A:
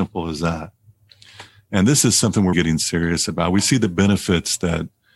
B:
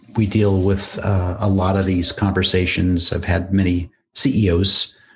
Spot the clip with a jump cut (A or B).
A